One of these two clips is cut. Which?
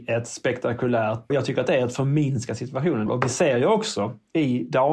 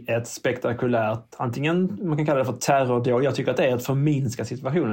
first; 2 cuts; at 1.3 s, 3.1 s

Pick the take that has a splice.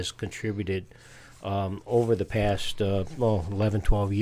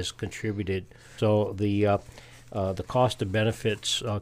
second; 1 cut; at 1.2 s

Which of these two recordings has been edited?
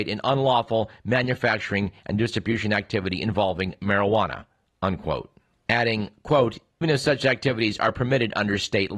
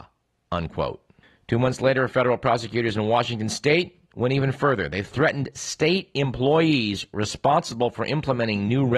first; 1 cut; at 6.8 s

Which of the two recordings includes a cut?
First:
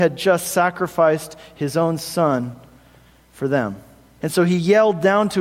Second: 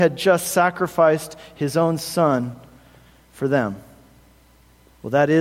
first; 1 cut; at 4.2 s

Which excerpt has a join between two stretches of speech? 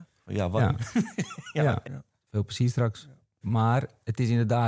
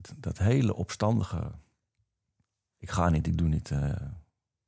first; 2 cuts; at 1.8 s, 3.4 s

